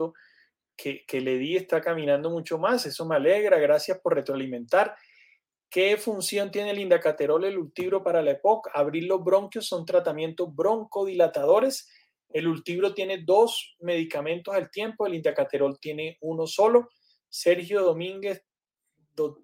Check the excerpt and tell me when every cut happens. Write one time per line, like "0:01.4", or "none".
none